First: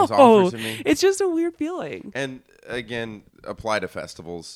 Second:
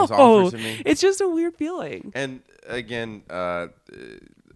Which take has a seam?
first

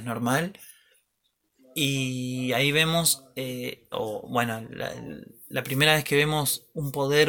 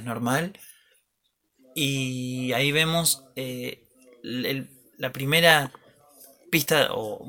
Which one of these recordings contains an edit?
first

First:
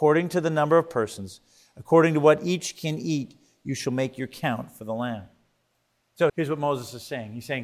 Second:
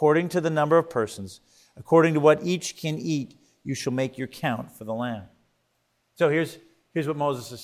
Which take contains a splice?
first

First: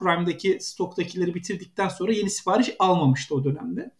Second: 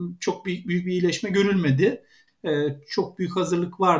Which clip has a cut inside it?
second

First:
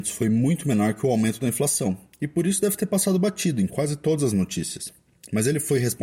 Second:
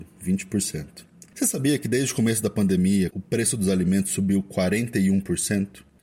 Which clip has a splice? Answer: second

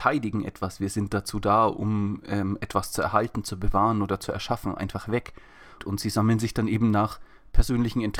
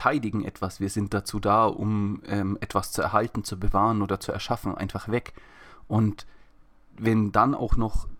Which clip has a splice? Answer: first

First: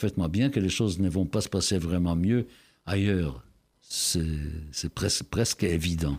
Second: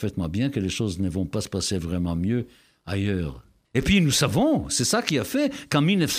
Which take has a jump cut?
second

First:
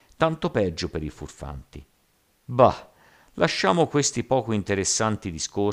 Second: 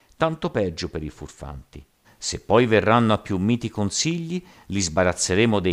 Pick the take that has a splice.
second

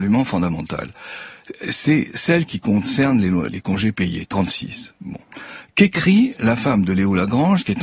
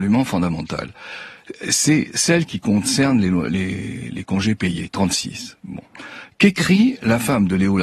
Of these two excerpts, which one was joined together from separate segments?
first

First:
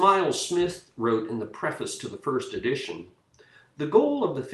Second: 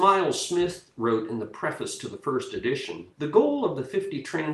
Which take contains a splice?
second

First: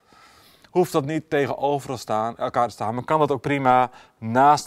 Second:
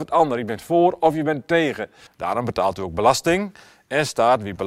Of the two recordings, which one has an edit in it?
second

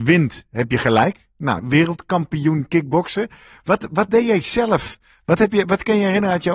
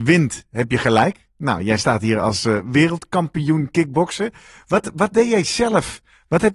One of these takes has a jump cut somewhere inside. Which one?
first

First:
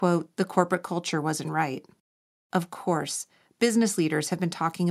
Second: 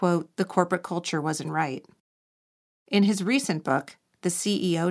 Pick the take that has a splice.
first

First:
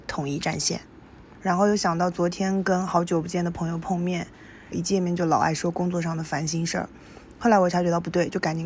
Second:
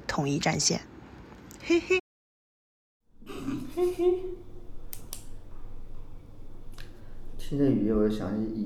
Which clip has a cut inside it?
first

